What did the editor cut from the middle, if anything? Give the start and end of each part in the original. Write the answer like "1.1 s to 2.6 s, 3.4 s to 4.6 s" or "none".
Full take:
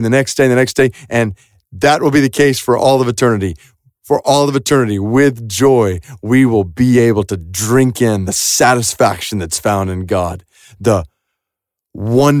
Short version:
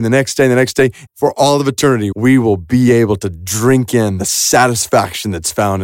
1.1 s to 3.9 s, 5.0 s to 6.2 s